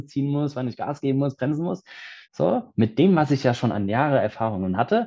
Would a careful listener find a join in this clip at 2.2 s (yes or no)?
yes